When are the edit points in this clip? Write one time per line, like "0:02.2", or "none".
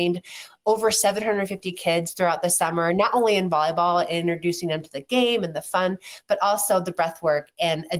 none